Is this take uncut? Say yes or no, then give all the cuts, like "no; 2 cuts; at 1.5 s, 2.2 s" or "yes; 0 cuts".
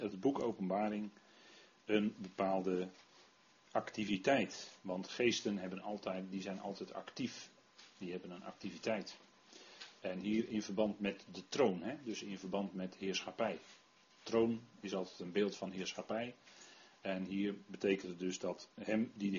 yes; 0 cuts